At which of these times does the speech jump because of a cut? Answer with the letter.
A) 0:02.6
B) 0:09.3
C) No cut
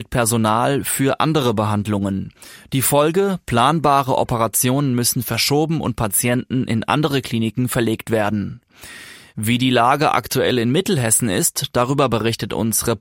C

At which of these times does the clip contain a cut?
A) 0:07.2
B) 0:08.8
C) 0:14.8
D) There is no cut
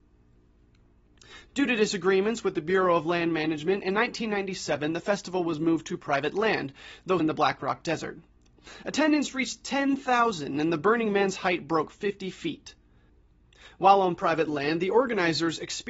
A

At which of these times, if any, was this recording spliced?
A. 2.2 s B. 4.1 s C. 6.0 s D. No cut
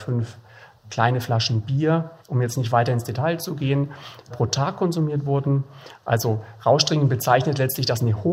A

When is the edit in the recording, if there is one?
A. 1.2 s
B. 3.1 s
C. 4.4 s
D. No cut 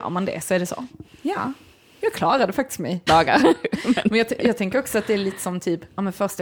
B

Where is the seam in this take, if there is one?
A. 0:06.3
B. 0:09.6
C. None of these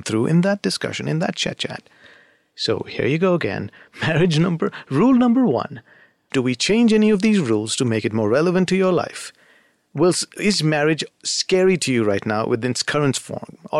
A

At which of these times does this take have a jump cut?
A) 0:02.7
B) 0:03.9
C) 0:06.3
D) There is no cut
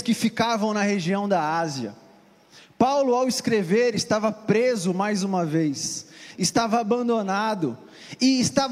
C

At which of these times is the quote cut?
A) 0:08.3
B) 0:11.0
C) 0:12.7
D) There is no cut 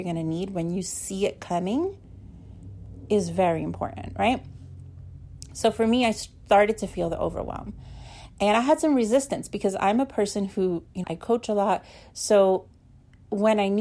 B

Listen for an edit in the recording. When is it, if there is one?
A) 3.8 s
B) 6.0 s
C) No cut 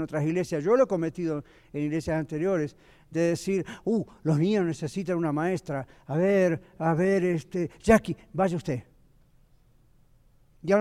C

